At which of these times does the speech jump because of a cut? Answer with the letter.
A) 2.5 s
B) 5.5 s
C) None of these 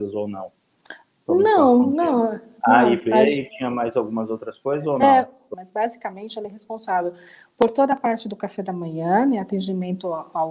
B